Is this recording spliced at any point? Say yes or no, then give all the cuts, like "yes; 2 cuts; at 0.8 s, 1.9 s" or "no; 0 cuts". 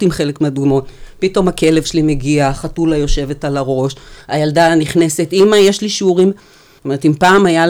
yes; 1 cut; at 6.8 s